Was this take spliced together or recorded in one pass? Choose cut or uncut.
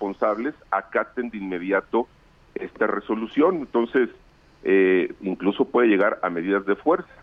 cut